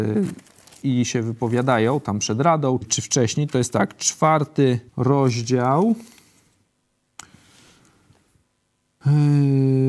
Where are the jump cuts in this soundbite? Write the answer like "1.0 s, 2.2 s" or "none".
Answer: 2.8 s, 4.9 s